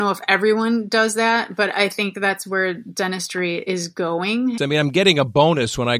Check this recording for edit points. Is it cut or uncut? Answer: cut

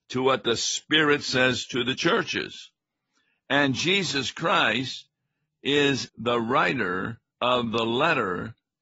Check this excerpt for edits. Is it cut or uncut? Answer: cut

